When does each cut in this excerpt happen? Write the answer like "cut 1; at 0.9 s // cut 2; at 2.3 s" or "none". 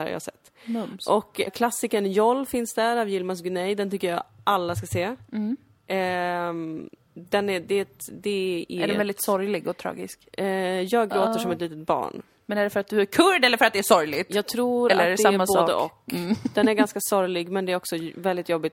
cut 1; at 1.5 s